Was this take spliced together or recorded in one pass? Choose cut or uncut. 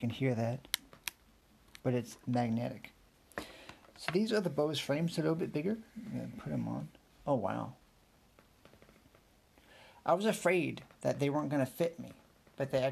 uncut